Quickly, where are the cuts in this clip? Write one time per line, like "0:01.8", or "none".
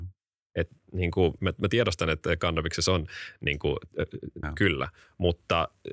0:01.4
0:04.4